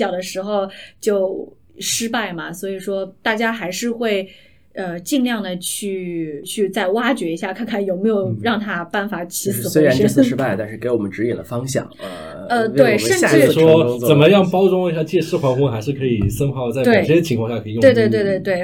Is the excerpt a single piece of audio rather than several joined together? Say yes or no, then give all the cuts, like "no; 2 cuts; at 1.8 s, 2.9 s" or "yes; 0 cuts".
yes; 0 cuts